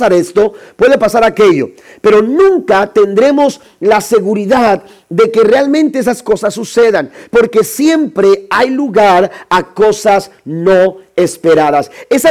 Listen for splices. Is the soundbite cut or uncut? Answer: uncut